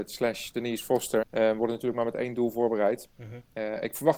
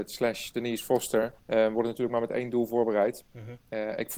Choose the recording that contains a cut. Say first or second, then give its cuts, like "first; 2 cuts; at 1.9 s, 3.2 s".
first; 1 cut; at 1.2 s